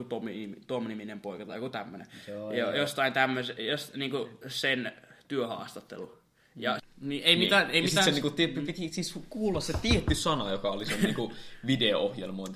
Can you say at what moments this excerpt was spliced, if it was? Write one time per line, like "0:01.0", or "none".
0:06.8